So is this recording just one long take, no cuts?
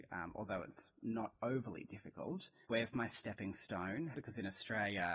no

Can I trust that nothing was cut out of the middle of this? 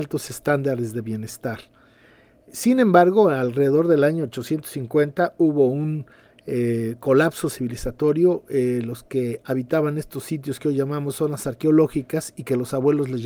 yes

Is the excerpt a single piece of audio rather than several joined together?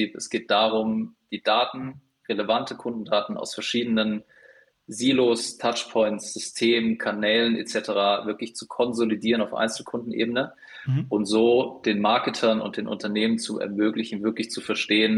yes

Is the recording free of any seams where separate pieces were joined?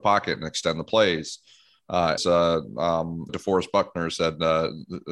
no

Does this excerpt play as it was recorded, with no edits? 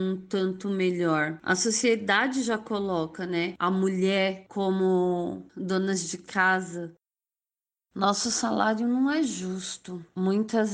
yes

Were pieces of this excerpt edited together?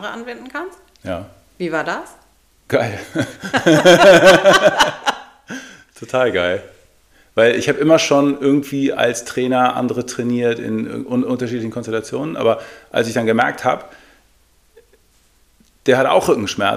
no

